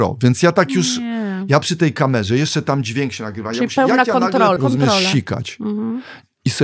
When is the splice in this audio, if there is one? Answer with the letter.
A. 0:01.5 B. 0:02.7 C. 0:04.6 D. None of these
C